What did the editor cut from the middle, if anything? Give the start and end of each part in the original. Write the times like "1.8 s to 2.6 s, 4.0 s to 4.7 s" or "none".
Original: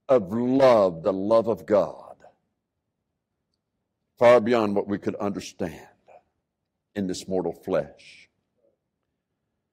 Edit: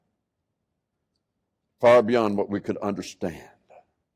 none